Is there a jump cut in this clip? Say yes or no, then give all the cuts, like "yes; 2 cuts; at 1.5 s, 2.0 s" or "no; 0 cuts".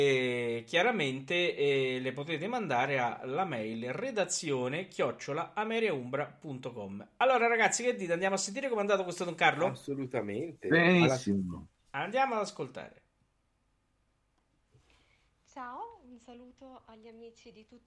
no; 0 cuts